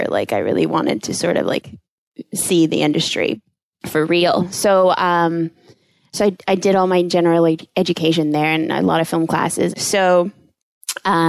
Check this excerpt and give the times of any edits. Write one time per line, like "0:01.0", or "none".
0:06.1
0:09.7

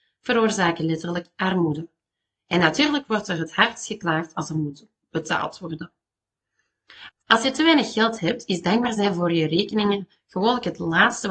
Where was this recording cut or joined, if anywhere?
0:07.1

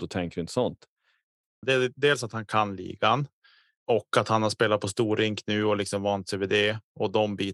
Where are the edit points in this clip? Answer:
0:01.6
0:03.8

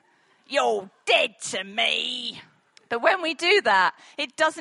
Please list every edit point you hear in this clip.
0:02.8

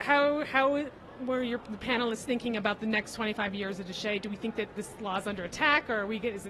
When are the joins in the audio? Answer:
none

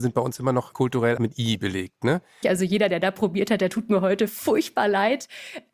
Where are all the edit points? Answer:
0:01.2
0:02.4

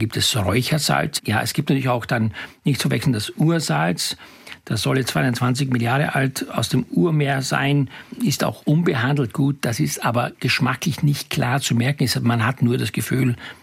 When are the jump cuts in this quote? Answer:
0:01.2

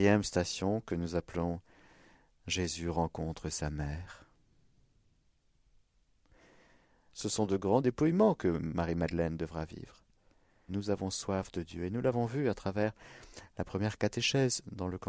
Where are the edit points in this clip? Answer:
0:07.1
0:10.7

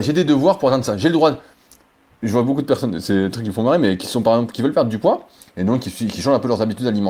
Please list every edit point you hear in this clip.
none

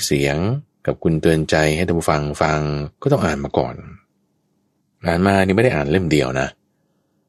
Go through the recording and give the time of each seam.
0:02.9

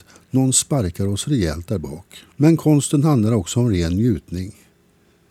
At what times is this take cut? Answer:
0:02.3

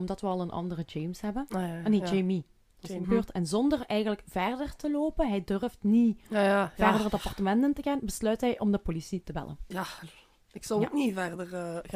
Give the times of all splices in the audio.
0:03.0

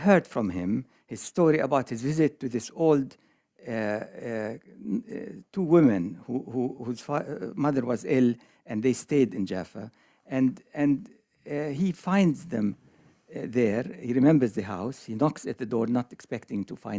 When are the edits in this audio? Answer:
0:06.8

